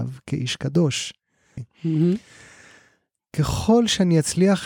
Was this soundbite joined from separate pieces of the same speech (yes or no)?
yes